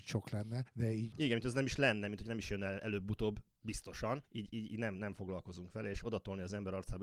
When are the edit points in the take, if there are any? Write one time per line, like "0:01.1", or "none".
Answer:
0:01.1

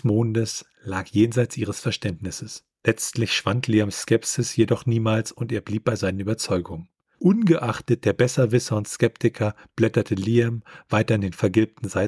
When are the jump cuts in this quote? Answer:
none

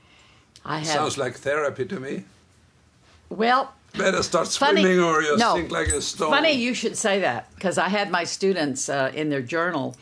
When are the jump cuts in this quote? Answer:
none

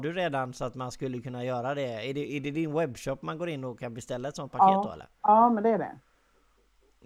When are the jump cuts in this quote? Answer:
none

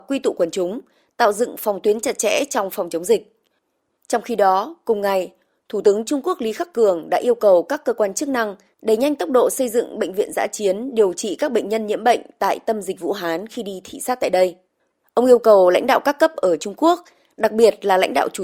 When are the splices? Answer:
0:04.0
0:15.0

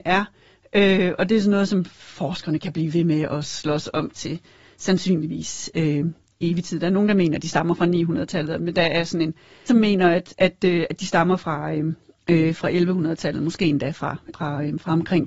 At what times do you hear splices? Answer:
0:09.7
0:14.3

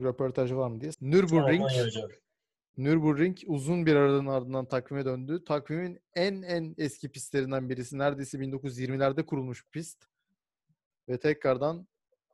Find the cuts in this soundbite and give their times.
0:00.9

